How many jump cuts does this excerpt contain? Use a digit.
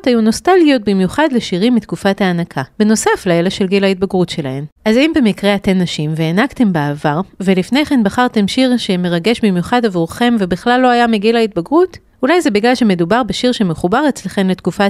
0